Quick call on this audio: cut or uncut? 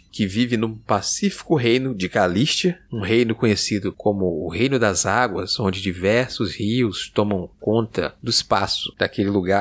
uncut